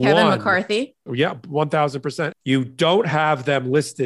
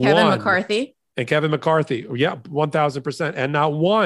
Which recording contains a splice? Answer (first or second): first